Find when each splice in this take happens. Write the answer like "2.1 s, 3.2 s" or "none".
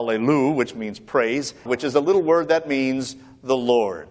1.7 s